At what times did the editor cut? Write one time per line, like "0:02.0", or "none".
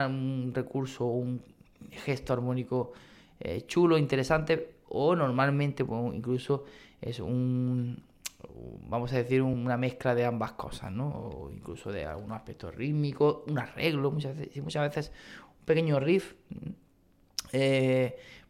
none